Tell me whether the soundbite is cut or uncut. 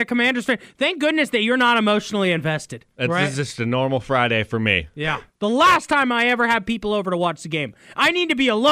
cut